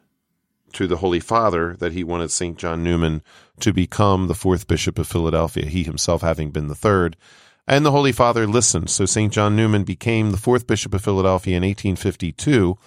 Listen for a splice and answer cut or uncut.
uncut